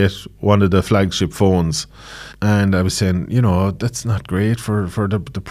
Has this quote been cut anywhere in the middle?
yes; 1 cut; at 2.3 s

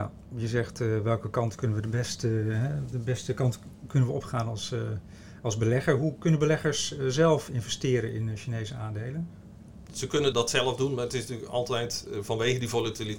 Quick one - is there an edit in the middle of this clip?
no; 0 cuts

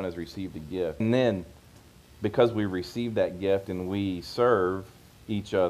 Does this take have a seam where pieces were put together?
yes; 1 cut; at 1.0 s

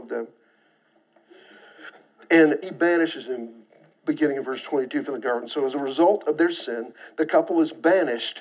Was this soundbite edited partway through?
yes; 1 cut; at 2.6 s

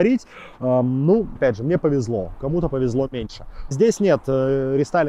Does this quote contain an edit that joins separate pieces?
yes; 2 cuts; at 1.4 s, 3.7 s

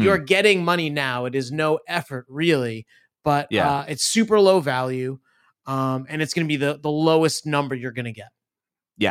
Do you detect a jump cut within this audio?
no; 0 cuts

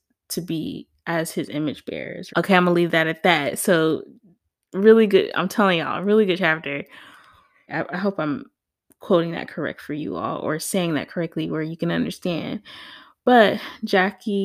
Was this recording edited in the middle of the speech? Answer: yes; 2 cuts; at 2.3 s, 7.7 s

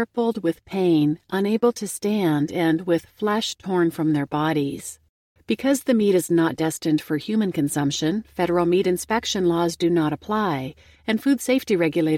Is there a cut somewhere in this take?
yes; 1 cut; at 5.4 s

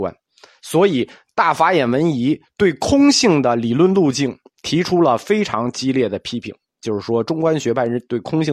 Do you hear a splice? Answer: no; 0 cuts

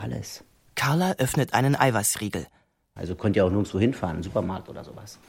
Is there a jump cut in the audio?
yes; 1 cut; at 3.0 s

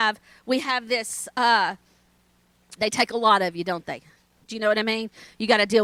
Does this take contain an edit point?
yes; 1 cut; at 2.8 s

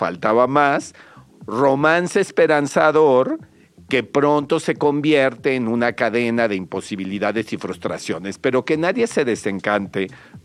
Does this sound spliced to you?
no; 0 cuts

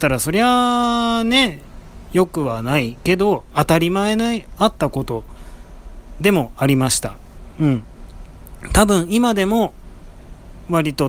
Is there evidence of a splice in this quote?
no; 0 cuts

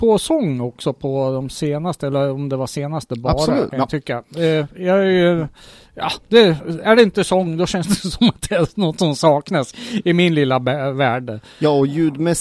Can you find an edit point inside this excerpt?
yes; 1 cut; at 3.7 s

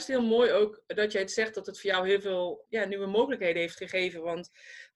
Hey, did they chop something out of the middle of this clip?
yes; 1 cut; at 2.6 s

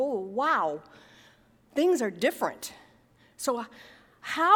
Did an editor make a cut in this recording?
no; 0 cuts

